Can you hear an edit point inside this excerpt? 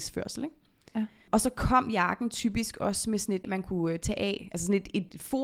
yes; 1 cut; at 3.4 s

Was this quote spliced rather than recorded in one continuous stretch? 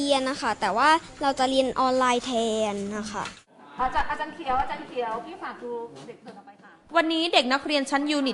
no; 0 cuts

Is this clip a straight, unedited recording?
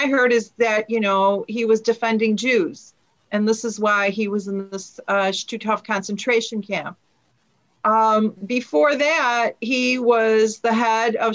yes; 0 cuts

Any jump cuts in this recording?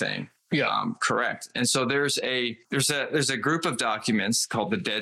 no; 0 cuts

